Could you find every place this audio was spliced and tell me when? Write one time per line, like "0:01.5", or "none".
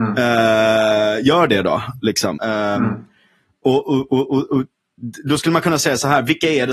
0:02.4